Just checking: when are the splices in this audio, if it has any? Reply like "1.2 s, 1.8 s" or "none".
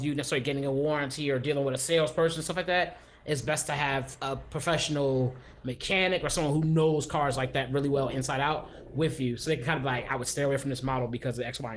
none